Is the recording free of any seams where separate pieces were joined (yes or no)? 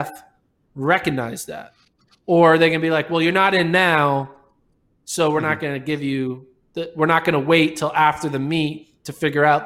yes